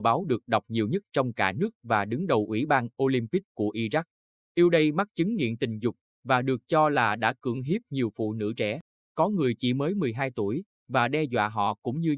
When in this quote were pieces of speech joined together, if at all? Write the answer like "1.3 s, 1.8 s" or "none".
4.4 s